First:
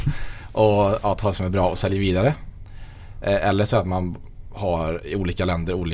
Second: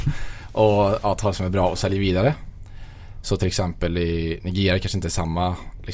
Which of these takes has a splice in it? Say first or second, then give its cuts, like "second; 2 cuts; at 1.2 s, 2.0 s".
second; 1 cut; at 3.2 s